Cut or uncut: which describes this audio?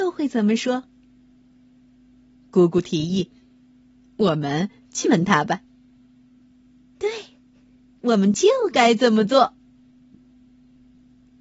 cut